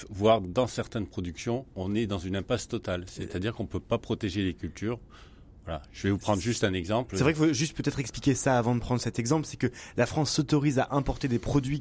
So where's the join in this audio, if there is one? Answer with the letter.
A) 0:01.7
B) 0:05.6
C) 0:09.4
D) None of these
A